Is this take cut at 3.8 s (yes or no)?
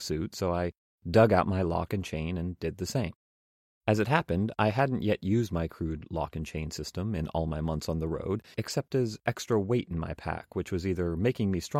yes